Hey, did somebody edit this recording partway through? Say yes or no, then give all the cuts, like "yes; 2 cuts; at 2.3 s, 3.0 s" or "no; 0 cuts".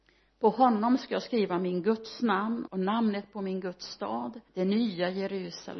yes; 2 cuts; at 2.7 s, 4.5 s